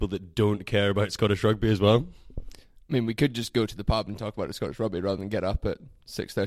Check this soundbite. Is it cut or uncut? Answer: uncut